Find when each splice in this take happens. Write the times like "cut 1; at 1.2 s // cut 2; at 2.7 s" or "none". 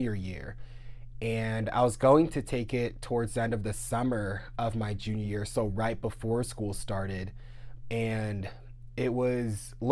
cut 1; at 7.8 s